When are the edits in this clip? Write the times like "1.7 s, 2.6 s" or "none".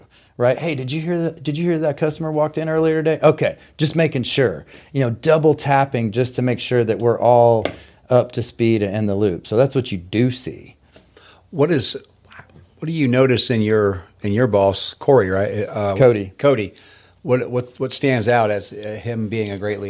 none

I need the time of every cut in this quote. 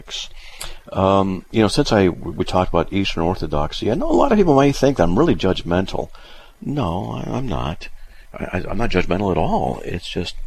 none

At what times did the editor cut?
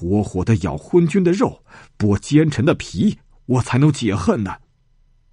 none

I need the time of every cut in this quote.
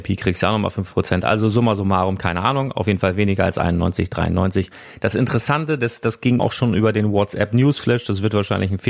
6.4 s

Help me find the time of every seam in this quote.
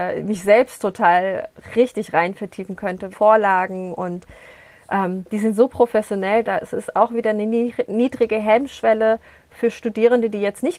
3.1 s, 6.4 s

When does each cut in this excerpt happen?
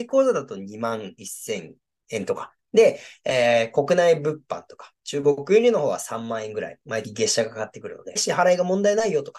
7.0 s, 8.2 s

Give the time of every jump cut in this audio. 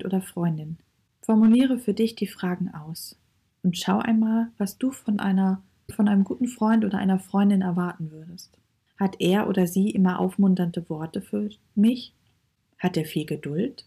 1.1 s, 8.9 s

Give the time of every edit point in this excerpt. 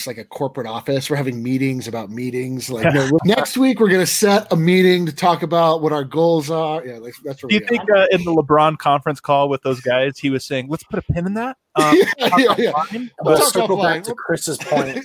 3.2 s

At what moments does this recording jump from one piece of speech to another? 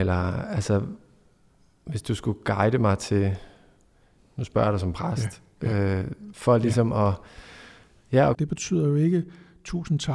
8.3 s

